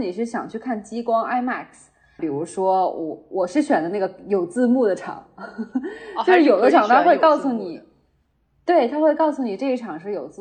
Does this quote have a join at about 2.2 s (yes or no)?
yes